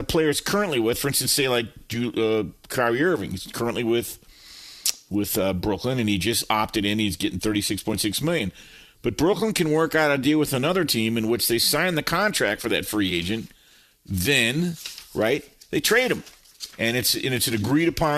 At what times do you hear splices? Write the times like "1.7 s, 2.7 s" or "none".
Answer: none